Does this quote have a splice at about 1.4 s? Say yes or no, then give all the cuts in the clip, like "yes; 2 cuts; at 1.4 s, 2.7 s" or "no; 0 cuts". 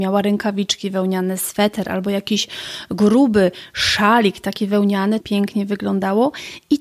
no; 1 cut; at 5.2 s